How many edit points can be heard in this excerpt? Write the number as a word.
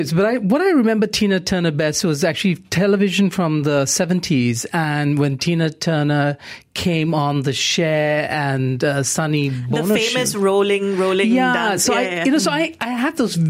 zero